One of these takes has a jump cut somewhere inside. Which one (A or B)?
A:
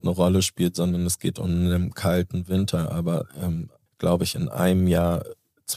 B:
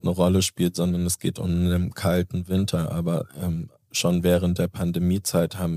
A